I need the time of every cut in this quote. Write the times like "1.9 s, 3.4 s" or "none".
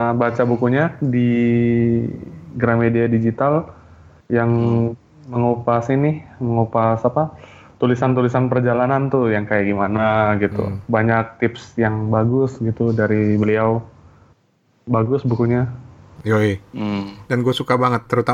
17.3 s

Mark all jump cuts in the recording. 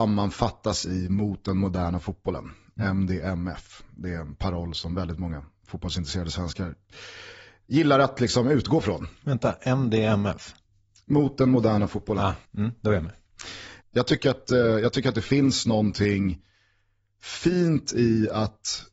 12.5 s, 13.8 s

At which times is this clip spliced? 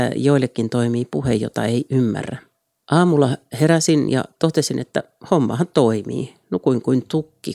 2.8 s

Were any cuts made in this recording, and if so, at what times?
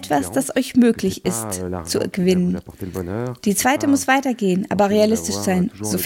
none

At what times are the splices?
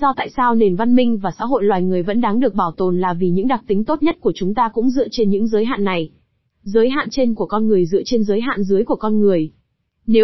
none

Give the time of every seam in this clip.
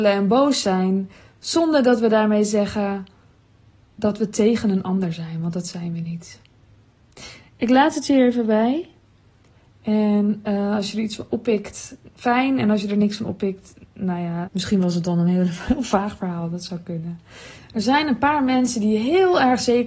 14.4 s, 17.5 s

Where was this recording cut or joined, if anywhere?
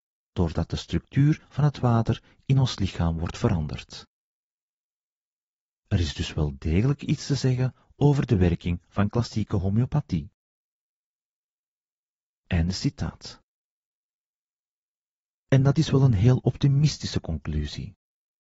none

